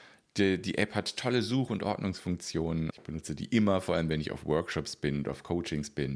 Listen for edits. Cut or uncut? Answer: cut